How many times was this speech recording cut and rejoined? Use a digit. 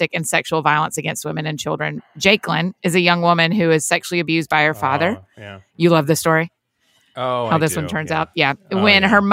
0